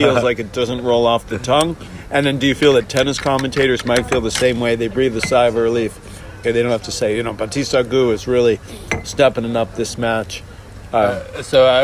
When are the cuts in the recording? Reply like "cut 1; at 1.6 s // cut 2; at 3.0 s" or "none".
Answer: cut 1; at 6.4 s